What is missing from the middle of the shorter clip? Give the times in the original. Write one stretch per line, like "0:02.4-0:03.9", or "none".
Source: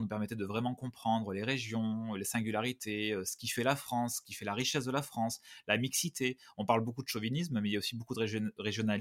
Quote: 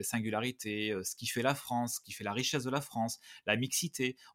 none